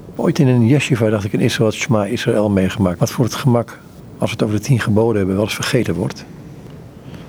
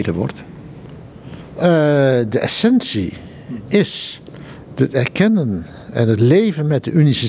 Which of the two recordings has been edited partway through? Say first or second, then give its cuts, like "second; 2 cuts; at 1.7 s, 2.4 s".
first; 1 cut; at 3.0 s